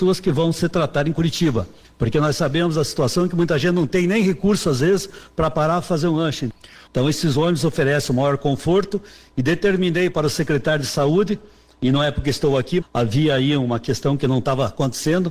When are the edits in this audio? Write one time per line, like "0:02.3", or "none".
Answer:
0:06.9
0:12.8